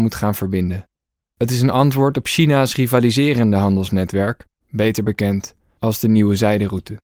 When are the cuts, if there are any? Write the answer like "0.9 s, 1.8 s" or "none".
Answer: 4.6 s